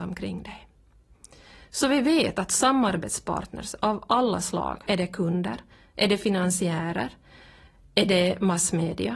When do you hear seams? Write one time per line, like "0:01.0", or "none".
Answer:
0:04.9